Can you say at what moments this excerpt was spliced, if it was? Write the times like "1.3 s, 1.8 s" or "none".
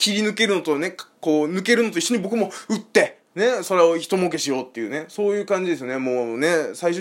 3.3 s